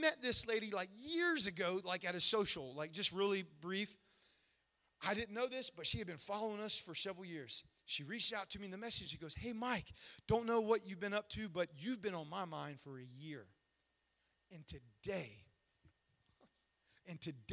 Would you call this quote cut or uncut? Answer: uncut